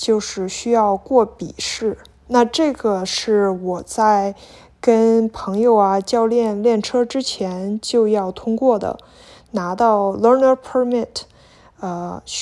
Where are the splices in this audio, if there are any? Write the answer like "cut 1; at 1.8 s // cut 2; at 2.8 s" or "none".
none